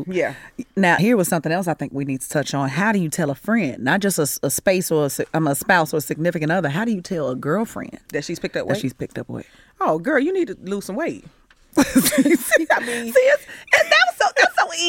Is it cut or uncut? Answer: cut